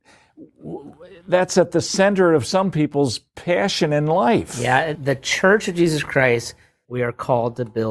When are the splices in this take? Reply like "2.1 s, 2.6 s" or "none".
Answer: 5.0 s, 6.8 s